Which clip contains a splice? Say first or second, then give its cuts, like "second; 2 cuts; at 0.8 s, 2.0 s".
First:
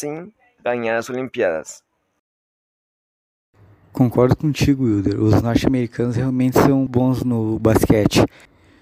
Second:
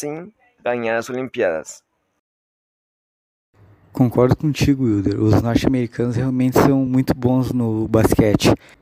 first; 1 cut; at 6.9 s